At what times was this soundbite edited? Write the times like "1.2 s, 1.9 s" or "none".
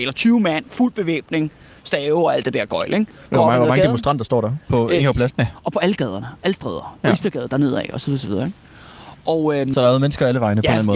5.3 s

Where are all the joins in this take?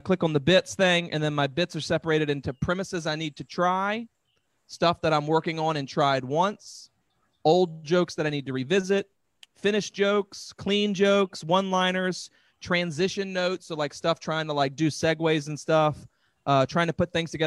none

